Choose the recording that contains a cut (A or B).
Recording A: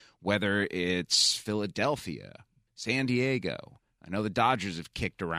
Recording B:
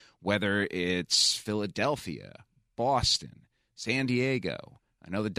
A